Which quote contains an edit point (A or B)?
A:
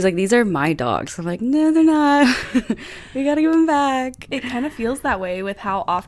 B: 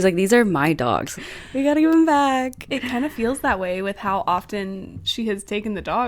B